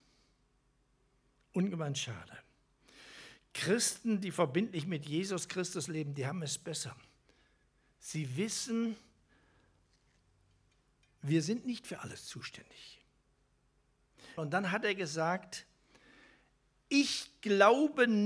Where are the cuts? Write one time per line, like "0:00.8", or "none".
0:14.4